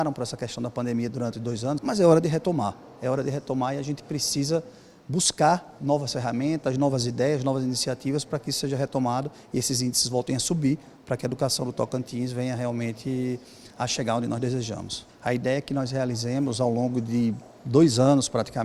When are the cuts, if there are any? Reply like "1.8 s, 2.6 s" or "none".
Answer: 1.8 s, 5.8 s, 15.1 s